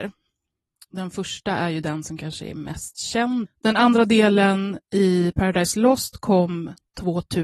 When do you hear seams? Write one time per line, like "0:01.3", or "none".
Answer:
0:03.4